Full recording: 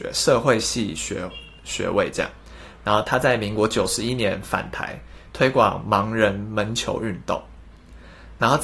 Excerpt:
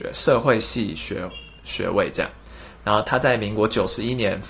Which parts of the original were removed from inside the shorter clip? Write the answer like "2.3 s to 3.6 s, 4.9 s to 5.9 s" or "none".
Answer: none